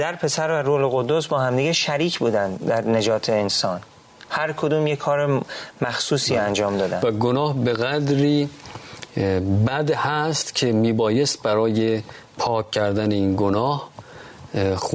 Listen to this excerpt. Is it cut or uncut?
uncut